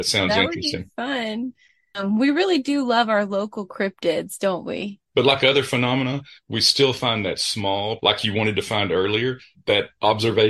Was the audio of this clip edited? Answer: yes; 2 cuts; at 5.1 s, 8.0 s

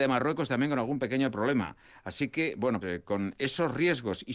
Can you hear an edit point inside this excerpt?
yes; 1 cut; at 2.8 s

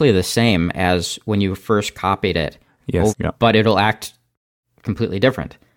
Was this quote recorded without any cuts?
no; 1 cut; at 3.1 s

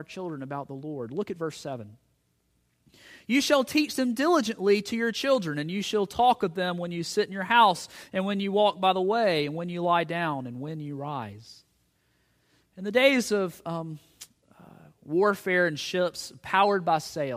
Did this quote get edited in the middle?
no; 0 cuts

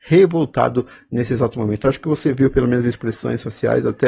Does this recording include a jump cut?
no; 0 cuts

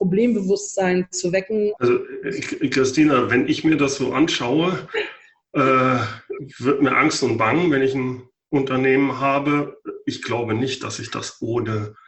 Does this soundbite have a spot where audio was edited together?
yes; 1 cut; at 1.8 s

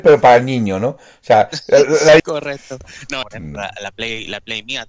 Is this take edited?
yes; 2 cuts; at 2.2 s, 3.2 s

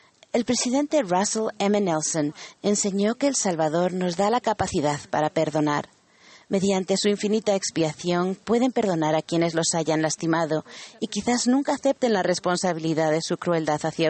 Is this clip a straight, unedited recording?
yes; 0 cuts

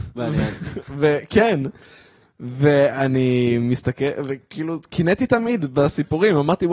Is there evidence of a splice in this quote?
no; 0 cuts

